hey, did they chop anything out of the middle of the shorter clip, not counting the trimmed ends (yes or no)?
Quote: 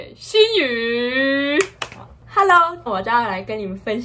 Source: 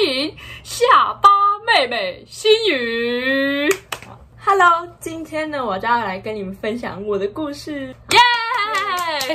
yes